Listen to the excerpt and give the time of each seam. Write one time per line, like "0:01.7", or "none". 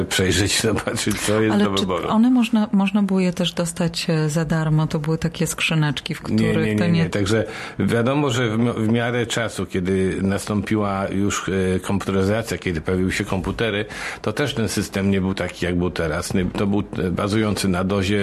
0:07.1